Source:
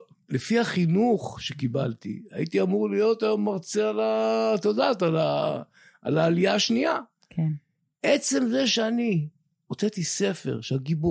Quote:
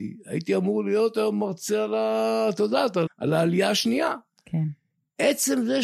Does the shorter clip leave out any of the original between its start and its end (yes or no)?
yes